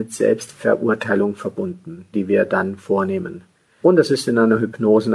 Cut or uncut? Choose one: cut